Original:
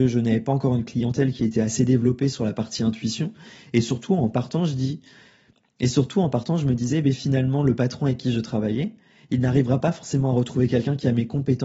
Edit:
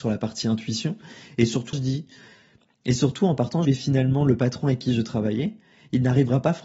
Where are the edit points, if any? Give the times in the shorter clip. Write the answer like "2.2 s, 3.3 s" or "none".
1.7 s, 3.6 s